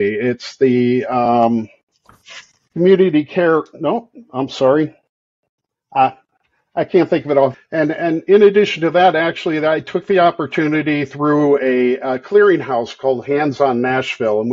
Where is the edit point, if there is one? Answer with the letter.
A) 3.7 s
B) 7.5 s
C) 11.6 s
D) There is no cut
B